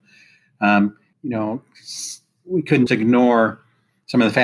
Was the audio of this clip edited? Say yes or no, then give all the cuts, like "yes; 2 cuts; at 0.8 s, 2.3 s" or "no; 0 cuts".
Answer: yes; 2 cuts; at 1.1 s, 2.9 s